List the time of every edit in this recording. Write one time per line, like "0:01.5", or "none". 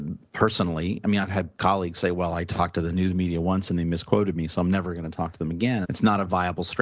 0:05.8